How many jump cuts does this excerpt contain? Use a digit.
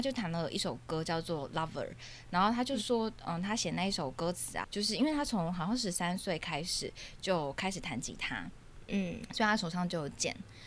1